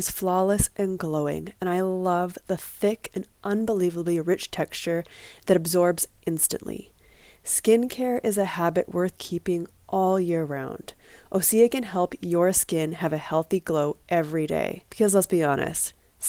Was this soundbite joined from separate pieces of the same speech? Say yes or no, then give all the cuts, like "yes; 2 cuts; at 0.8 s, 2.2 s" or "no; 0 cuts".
yes; 1 cut; at 14.9 s